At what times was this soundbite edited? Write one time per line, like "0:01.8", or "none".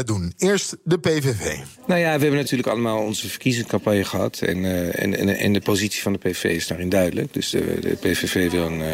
none